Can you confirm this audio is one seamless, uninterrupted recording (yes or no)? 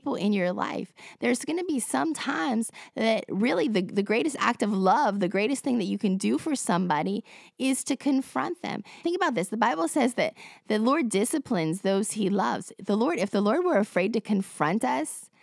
no